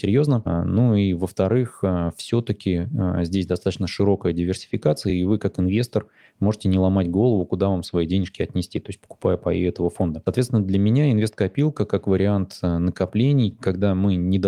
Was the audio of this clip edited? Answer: no; 0 cuts

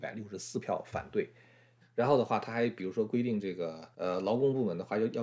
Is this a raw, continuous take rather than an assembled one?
no; 2 cuts; at 1.8 s, 3.9 s

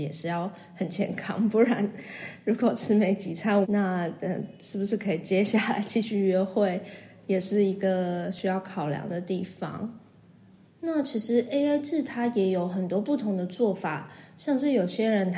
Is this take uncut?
no; 2 cuts; at 3.6 s, 10.6 s

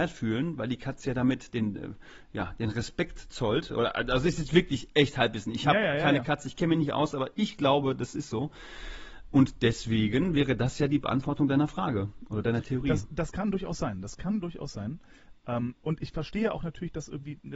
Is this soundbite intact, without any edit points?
yes; 0 cuts

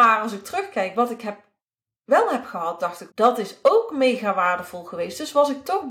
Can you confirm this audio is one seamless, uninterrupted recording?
no; 1 cut; at 3.1 s

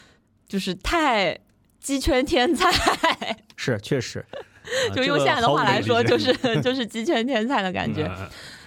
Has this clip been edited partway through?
no; 0 cuts

